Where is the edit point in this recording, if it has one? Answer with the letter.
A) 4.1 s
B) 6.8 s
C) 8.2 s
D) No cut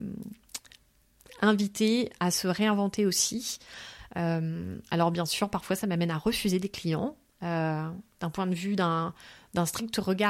A